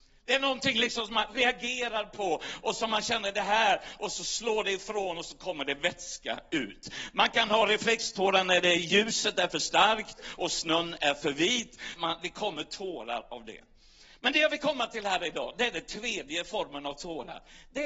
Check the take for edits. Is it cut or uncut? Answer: cut